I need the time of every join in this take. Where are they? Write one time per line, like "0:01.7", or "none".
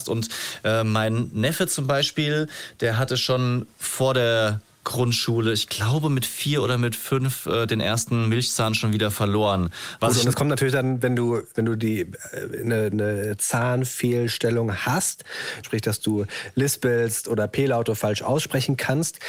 0:10.0
0:12.9
0:15.6